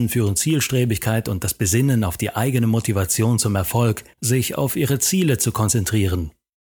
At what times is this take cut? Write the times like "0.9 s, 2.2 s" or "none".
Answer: 4.1 s